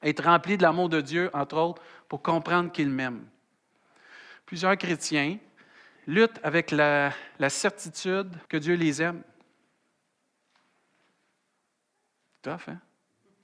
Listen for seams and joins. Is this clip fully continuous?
no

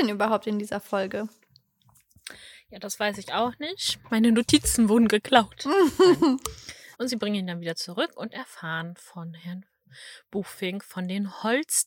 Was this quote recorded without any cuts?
no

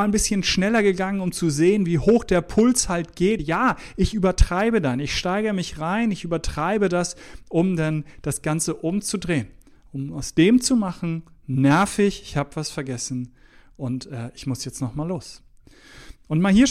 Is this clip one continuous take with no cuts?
yes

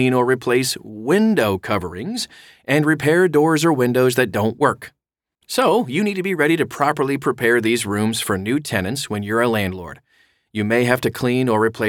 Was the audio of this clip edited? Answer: yes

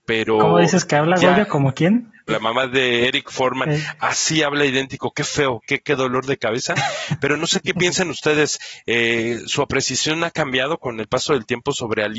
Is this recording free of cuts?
no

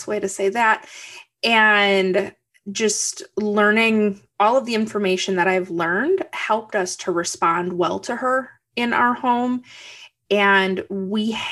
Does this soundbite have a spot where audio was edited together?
no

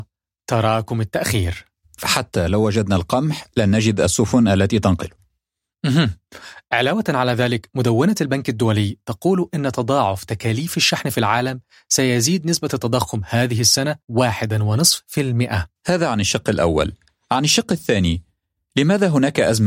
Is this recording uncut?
no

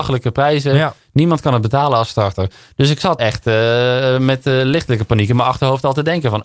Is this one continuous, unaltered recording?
no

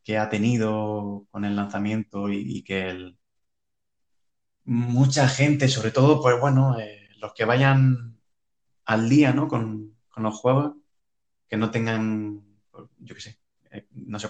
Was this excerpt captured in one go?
yes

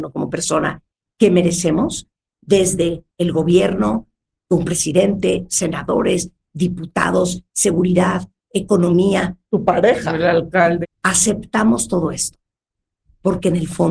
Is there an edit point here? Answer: yes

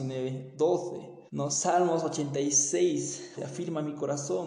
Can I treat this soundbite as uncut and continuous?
no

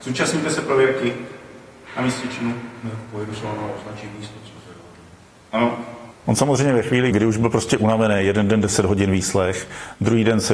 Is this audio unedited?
no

